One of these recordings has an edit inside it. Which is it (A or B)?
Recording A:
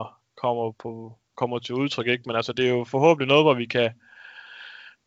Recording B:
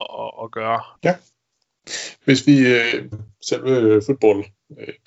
B